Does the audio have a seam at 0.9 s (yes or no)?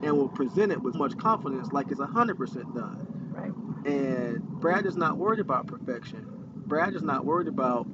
yes